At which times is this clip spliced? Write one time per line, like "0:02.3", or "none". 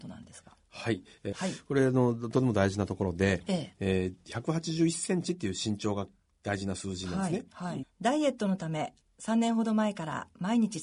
0:01.3
0:07.8

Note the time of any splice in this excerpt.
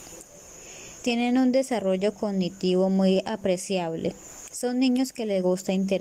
0:01.0
0:04.5

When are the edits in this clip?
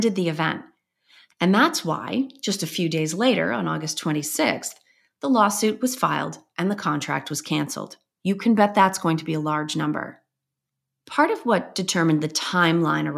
0:01.3
0:08.2

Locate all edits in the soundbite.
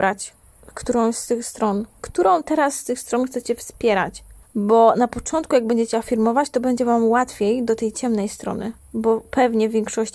0:02.0

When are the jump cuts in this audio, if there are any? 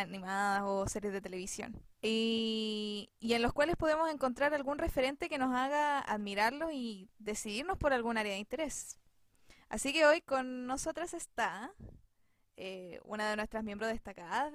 0:01.9

